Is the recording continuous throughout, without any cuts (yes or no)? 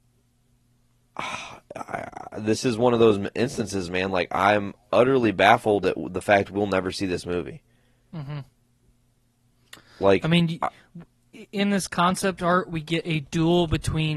yes